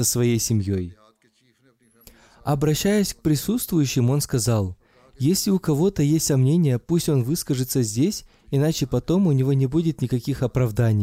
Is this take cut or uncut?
uncut